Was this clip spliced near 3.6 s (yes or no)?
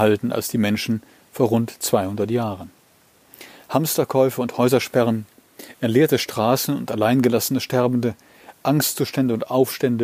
no